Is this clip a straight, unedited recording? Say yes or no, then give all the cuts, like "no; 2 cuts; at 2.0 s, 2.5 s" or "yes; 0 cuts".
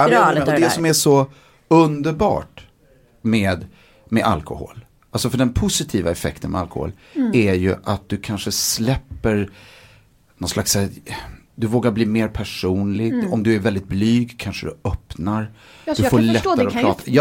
yes; 0 cuts